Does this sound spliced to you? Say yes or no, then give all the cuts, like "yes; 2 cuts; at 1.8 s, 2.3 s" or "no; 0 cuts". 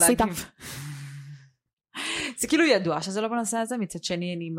no; 0 cuts